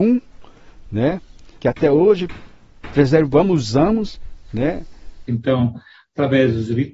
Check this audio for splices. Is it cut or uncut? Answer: cut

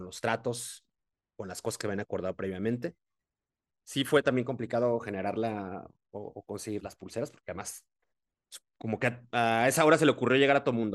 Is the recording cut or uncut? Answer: cut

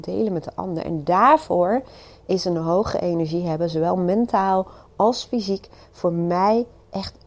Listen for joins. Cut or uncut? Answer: uncut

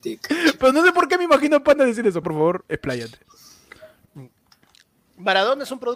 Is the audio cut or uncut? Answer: cut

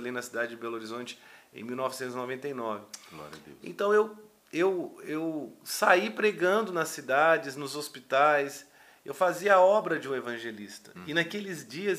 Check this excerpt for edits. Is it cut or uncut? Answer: uncut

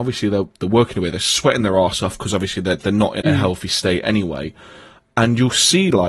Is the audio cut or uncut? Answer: cut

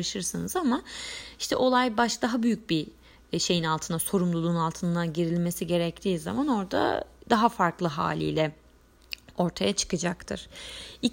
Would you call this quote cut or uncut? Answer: uncut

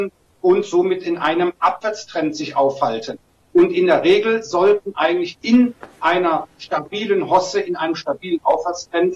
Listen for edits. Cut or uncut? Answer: uncut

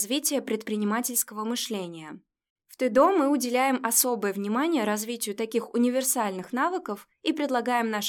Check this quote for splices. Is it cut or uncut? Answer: cut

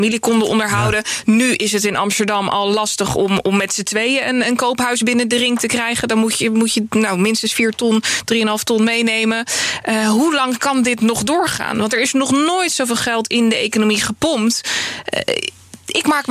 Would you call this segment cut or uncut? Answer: uncut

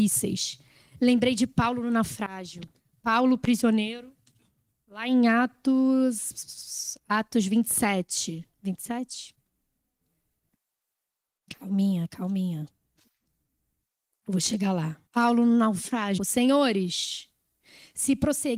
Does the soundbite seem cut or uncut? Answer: cut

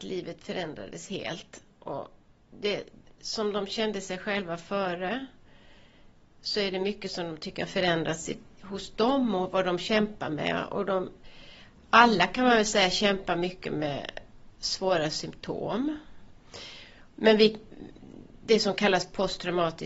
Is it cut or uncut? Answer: uncut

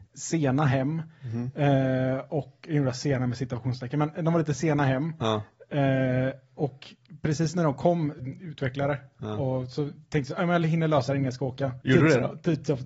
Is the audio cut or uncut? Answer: cut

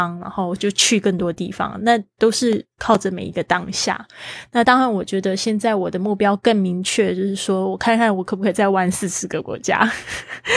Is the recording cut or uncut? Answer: cut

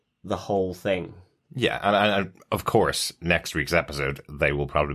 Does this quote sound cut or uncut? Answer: uncut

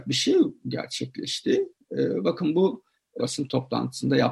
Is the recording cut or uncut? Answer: cut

